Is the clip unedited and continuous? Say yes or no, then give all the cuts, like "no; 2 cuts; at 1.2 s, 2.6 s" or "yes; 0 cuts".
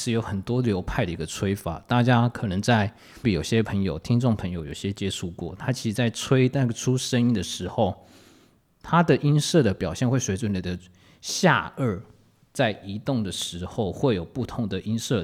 no; 1 cut; at 3.2 s